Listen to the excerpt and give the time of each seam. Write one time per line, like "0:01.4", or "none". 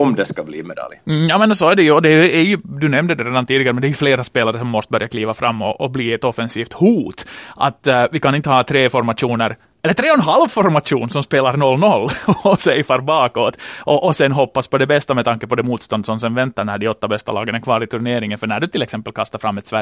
none